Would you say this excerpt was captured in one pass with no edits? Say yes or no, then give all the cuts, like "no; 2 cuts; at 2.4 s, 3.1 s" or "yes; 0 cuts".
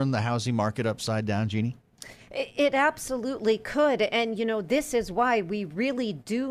yes; 0 cuts